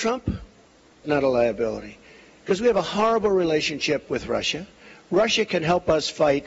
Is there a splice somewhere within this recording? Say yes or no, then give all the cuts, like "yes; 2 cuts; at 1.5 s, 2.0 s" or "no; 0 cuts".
yes; 1 cut; at 1.0 s